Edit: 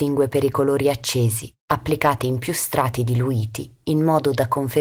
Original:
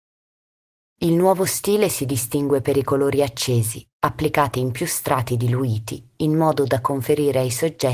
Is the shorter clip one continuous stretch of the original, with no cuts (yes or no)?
yes